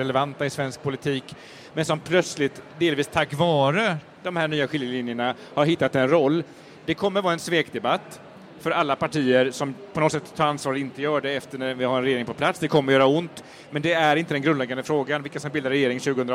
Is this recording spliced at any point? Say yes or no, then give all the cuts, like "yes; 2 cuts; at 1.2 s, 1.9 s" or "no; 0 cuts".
no; 0 cuts